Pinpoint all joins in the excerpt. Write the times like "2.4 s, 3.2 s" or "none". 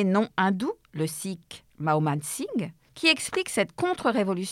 2.9 s